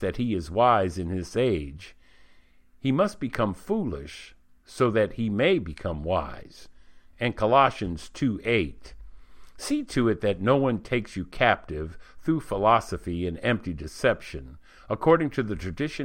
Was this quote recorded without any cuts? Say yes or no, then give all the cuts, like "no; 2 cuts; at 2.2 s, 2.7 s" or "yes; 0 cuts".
yes; 0 cuts